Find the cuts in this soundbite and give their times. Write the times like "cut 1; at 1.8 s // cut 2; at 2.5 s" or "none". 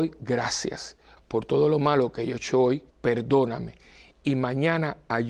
cut 1; at 1.2 s // cut 2; at 2.9 s